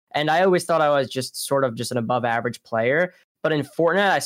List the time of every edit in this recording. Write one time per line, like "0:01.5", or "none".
none